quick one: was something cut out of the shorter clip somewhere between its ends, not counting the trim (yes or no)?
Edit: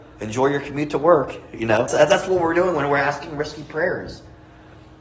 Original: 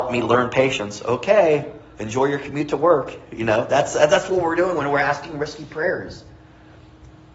yes